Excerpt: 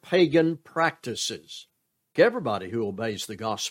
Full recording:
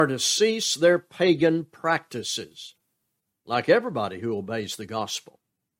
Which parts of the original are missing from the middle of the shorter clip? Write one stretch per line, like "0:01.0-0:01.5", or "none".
0:03.2-0:03.7